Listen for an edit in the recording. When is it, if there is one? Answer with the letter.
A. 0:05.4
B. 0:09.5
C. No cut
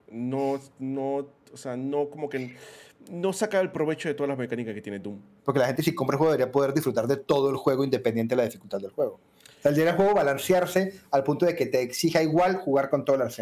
A